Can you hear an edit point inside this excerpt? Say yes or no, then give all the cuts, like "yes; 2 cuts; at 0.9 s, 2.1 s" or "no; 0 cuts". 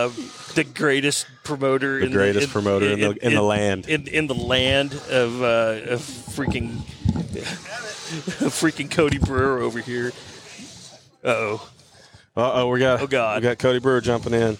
no; 0 cuts